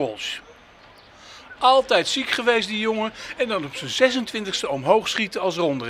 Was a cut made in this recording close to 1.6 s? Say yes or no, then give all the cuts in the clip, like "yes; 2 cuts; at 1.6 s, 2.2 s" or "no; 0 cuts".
yes; 1 cut; at 1.6 s